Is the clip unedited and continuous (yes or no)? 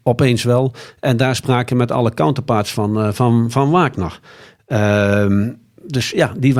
yes